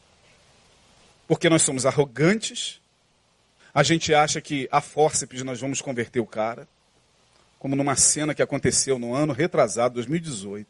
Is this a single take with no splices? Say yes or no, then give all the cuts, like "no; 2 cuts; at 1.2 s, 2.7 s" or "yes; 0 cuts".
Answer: no; 1 cut; at 3.6 s